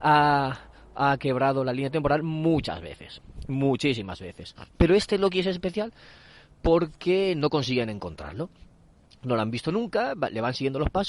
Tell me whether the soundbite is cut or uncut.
cut